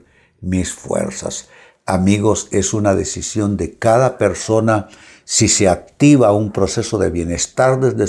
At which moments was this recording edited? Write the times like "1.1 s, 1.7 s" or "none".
none